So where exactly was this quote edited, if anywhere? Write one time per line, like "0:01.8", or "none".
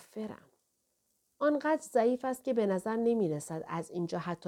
none